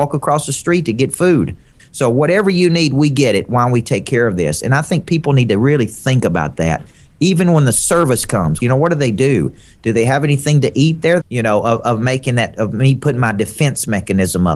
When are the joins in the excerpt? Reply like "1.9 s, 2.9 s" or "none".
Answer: 1.8 s, 8.6 s, 11.2 s